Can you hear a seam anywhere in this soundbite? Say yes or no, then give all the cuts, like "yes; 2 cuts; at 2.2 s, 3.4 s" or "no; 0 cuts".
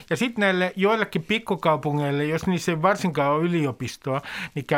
no; 0 cuts